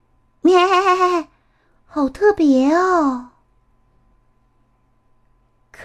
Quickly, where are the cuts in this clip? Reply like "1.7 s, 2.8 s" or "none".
1.8 s